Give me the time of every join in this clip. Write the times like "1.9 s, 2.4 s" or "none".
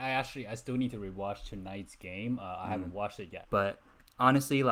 3.4 s